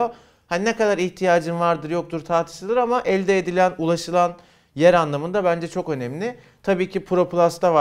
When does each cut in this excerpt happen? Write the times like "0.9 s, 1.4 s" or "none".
none